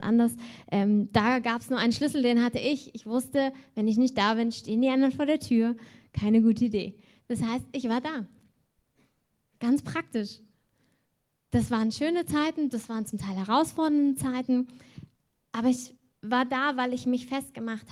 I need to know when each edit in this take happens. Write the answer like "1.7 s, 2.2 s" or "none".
none

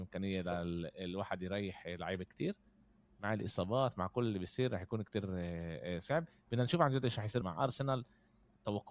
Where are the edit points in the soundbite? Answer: 7.4 s

